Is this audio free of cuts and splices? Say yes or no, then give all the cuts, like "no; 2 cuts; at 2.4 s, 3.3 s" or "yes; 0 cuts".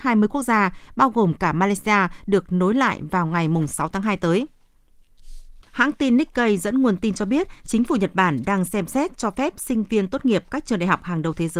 no; 1 cut; at 5.7 s